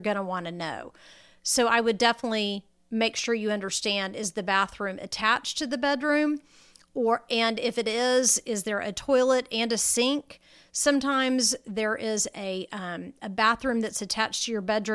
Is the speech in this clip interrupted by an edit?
no; 0 cuts

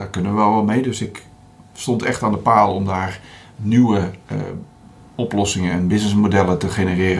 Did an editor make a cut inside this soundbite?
no; 0 cuts

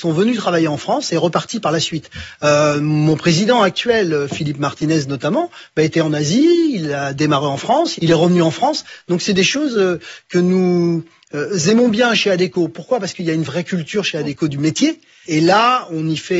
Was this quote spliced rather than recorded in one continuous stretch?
yes; 2 cuts; at 8.0 s, 15.2 s

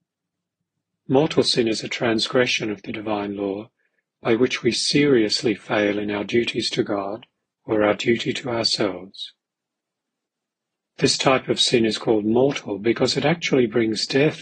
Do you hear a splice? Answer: yes; 1 cut; at 7.4 s

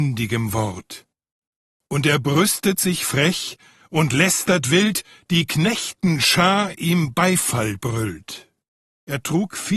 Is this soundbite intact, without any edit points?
no; 1 cut; at 8.9 s

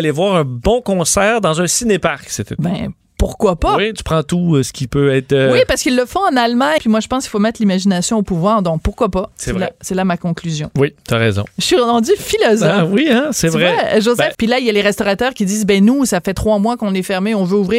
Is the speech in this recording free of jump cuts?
no; 3 cuts; at 6.8 s, 9.3 s, 14.3 s

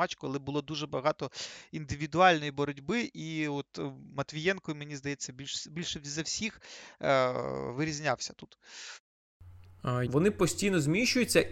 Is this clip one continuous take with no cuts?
no; 1 cut; at 10.1 s

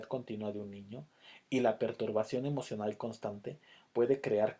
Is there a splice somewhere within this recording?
yes; 1 cut; at 1.4 s

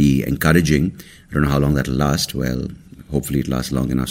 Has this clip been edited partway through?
no; 0 cuts

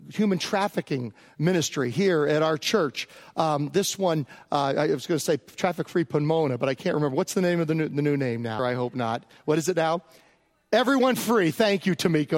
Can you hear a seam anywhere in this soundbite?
yes; 1 cut; at 8.6 s

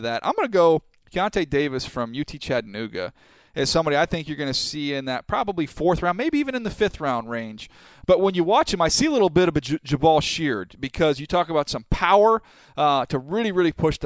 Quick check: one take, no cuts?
yes; 0 cuts

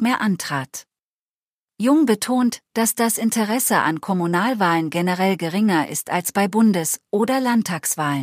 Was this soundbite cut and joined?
no; 0 cuts

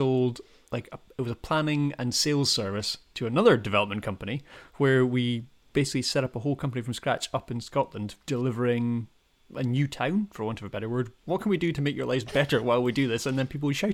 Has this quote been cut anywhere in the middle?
yes; 2 cuts; at 8.2 s, 11.2 s

